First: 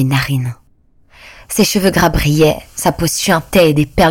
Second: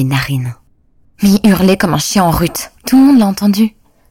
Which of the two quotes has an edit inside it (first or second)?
second